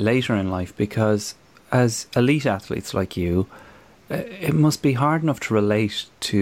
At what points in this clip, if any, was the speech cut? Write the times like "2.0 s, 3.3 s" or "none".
none

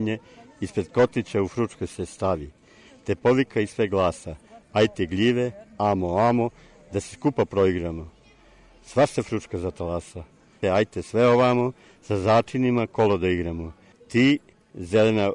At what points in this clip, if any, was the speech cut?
10.6 s, 13.9 s

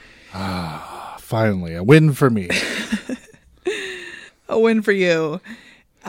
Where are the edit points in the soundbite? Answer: none

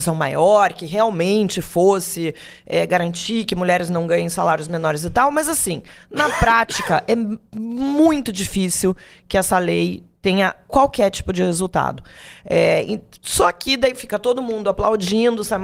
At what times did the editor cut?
none

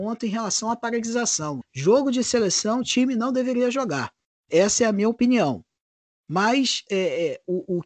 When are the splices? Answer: 1.6 s, 6.9 s

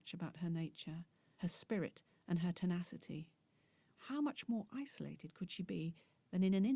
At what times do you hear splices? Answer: 1.4 s, 4.0 s

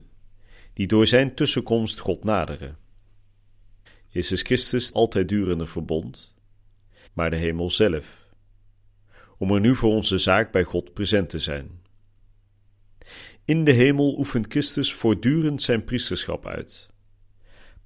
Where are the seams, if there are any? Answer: 3.9 s, 4.9 s, 7.1 s

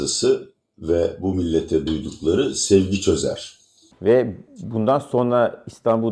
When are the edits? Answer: 3.9 s

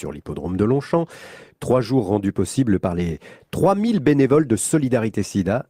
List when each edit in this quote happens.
1.5 s

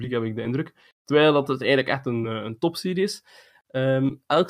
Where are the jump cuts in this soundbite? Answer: none

